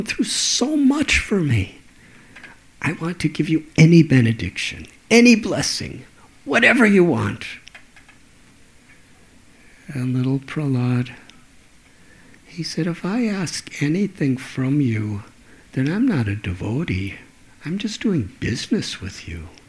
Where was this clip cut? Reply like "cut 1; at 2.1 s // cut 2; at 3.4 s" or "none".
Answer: none